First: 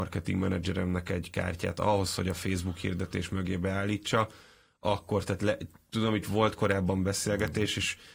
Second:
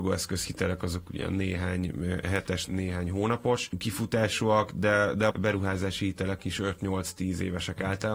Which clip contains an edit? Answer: second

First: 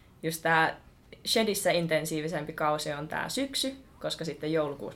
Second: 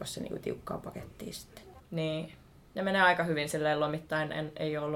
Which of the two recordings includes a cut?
second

